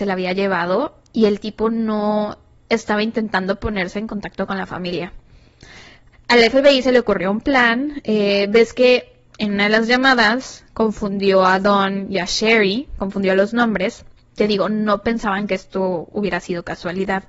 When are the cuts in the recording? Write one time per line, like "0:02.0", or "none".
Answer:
0:06.1